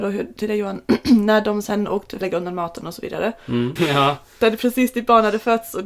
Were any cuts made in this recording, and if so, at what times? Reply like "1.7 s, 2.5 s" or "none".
2.2 s, 3.8 s